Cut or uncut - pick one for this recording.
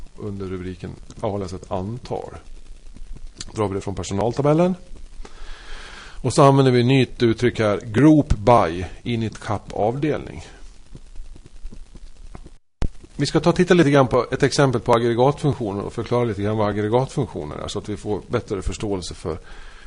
uncut